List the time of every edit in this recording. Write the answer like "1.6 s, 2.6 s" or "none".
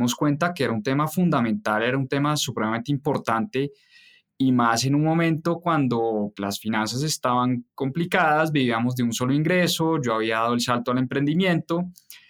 6.4 s